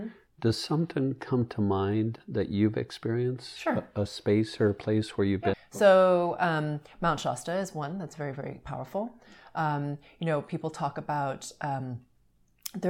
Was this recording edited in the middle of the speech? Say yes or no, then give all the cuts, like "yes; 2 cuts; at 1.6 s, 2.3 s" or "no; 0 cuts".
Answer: yes; 1 cut; at 5.5 s